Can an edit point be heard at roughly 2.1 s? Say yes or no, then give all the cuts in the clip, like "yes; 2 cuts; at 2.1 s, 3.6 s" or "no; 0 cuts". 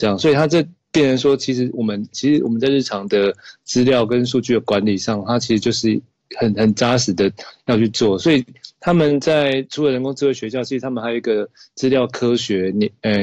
yes; 1 cut; at 2.1 s